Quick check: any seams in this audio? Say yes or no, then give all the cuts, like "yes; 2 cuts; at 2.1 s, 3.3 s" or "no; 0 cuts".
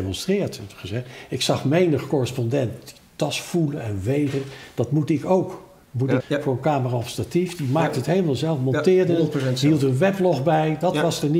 yes; 1 cut; at 6.2 s